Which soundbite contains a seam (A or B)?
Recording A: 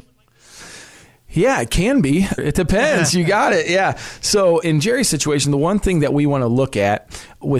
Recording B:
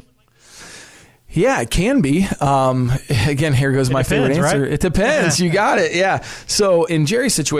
A